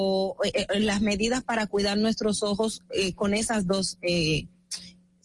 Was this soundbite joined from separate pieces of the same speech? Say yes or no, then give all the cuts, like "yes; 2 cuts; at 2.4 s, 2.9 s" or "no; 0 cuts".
no; 0 cuts